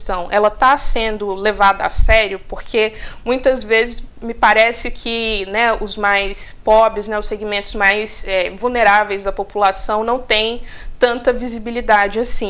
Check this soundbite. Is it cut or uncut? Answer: uncut